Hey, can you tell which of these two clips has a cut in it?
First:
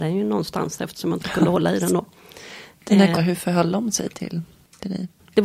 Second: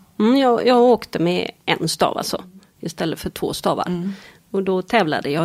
first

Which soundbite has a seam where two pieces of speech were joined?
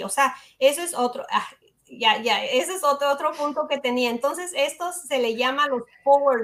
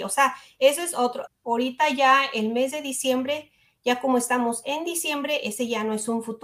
second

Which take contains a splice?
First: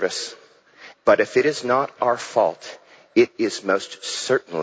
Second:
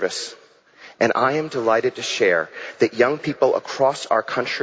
first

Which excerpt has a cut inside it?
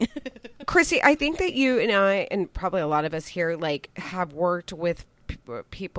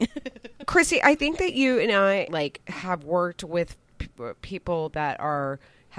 second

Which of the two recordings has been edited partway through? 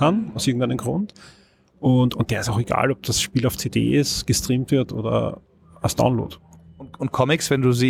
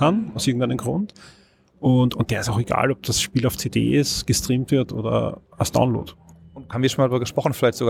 second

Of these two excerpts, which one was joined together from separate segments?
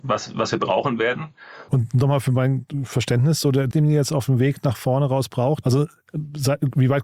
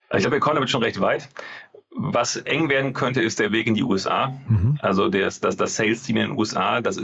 first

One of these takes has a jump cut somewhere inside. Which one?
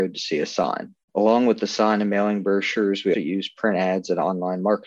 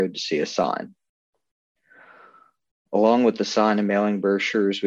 first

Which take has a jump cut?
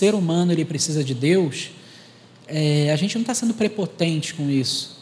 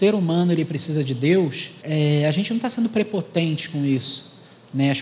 second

